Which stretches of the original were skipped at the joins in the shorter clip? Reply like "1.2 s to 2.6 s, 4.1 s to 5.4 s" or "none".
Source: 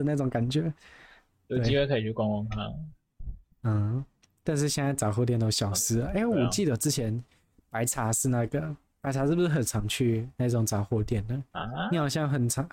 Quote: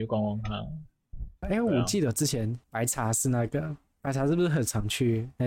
3.5 s to 6.1 s, 7.3 s to 7.6 s